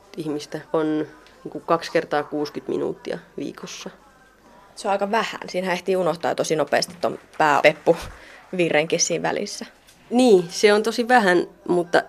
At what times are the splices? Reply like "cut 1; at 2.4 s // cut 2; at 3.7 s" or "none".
cut 1; at 7.6 s